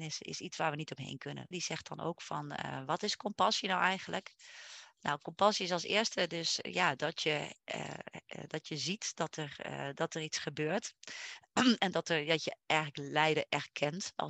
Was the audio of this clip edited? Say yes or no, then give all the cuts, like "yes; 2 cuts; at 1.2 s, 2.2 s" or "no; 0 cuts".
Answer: yes; 1 cut; at 1.5 s